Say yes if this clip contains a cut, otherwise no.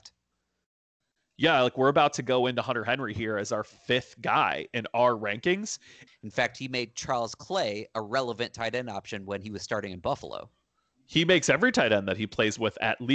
yes